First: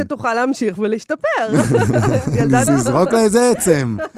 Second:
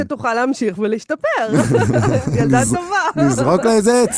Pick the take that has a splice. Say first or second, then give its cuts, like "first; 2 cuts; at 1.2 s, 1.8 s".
first; 1 cut; at 2.7 s